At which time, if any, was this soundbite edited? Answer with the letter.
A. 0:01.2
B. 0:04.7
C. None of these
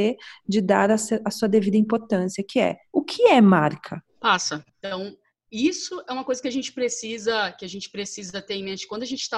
B